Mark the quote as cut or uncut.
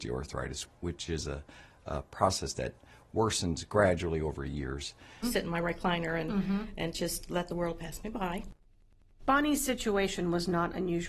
cut